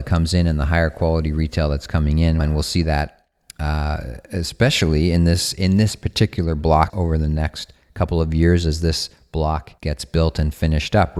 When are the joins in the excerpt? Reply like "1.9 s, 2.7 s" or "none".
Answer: 2.4 s, 6.9 s, 9.8 s

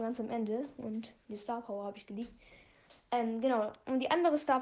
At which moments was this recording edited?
none

